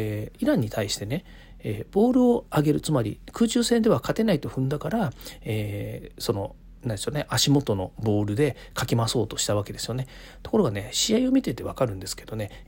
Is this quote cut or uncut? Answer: uncut